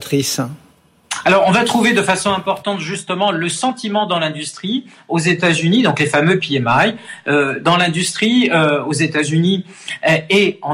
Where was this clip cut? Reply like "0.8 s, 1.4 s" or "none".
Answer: none